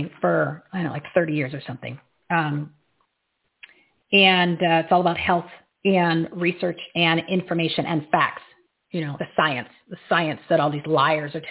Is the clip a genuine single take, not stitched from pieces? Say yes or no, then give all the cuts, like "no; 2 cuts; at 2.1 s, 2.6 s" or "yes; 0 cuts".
no; 1 cut; at 9.2 s